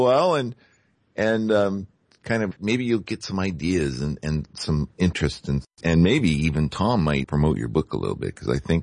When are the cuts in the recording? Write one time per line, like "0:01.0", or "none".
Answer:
0:02.6
0:05.8
0:07.2